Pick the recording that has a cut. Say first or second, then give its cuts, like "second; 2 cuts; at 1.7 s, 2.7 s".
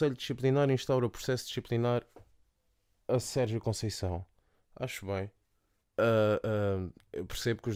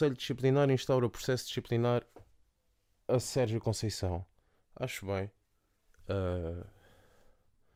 first; 1 cut; at 5.8 s